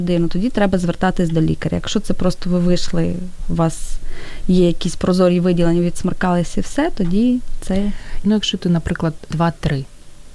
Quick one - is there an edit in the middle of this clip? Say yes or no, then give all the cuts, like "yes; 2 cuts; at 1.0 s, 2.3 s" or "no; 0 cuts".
yes; 2 cuts; at 8.2 s, 9.3 s